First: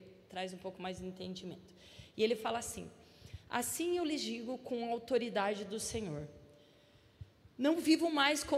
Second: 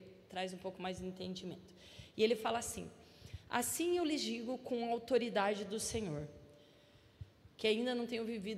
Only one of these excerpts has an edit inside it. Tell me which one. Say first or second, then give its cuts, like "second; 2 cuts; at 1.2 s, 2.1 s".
second; 1 cut; at 7.5 s